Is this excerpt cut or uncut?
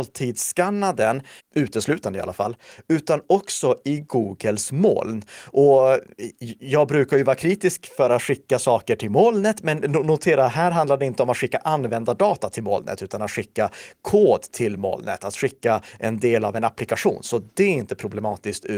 cut